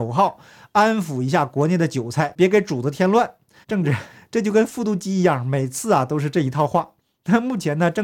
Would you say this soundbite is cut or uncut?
cut